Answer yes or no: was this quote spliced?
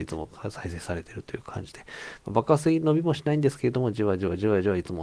no